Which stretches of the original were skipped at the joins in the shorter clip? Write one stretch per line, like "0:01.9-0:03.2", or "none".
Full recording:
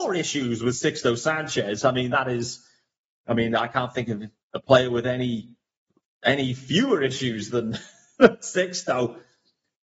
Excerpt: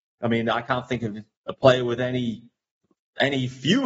none